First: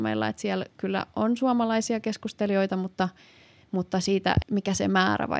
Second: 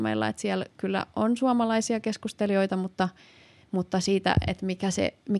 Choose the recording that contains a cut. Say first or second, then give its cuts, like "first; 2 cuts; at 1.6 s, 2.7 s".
first; 1 cut; at 4.4 s